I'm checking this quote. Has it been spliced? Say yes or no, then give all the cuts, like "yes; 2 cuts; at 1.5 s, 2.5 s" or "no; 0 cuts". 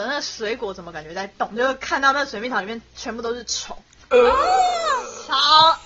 no; 0 cuts